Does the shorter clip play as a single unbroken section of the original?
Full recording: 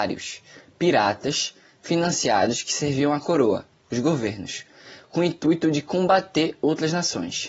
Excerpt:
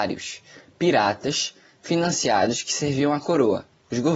yes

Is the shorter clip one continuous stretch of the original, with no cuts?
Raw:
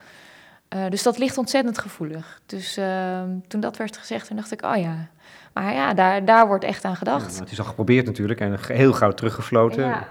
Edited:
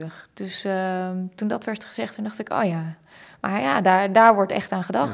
yes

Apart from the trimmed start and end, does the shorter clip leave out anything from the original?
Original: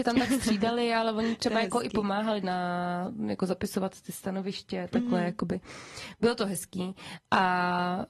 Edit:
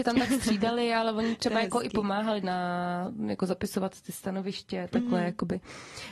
no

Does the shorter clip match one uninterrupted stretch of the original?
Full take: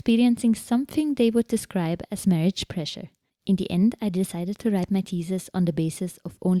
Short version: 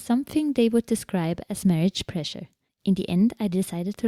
yes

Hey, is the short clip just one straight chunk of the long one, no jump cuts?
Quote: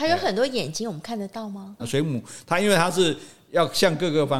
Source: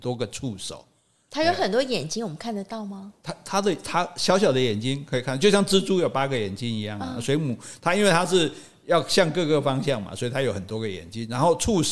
no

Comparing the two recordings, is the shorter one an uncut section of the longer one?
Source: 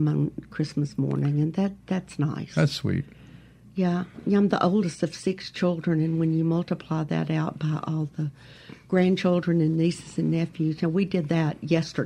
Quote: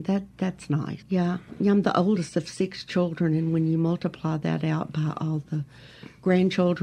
no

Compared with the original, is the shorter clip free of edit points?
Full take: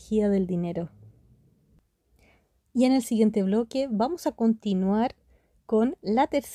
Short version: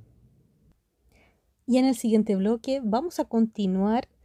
yes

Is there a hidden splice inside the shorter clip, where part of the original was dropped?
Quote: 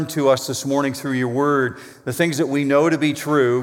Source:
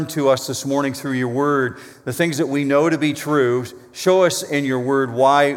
no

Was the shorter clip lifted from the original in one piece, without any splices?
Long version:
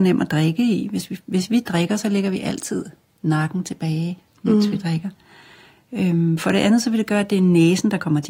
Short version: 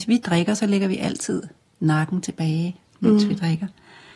yes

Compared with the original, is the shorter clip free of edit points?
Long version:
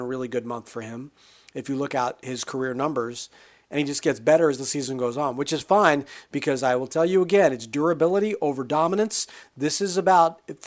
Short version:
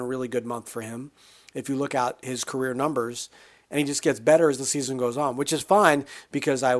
yes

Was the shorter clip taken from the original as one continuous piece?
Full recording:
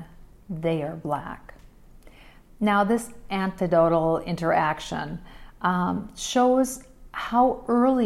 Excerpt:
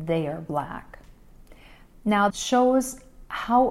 no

